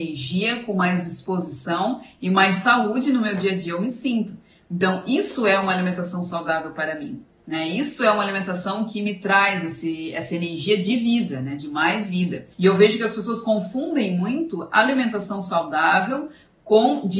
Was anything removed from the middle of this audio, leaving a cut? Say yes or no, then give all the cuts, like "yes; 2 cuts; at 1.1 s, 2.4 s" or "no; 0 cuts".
yes; 1 cut; at 12.5 s